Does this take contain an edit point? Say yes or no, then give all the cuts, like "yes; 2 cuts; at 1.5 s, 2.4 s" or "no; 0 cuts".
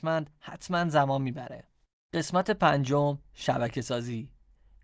no; 0 cuts